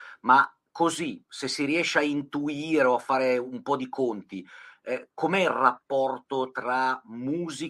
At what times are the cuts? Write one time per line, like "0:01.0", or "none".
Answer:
none